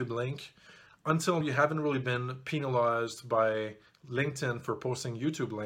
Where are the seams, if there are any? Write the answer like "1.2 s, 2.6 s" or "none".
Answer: 1.4 s